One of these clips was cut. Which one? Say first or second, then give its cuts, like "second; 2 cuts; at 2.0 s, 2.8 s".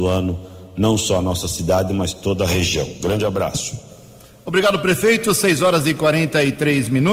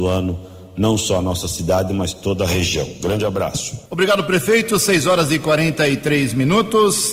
second; 1 cut; at 3.9 s